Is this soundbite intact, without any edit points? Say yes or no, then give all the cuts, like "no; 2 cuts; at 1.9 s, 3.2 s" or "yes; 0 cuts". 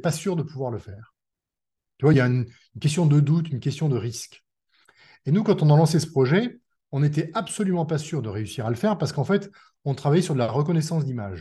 yes; 0 cuts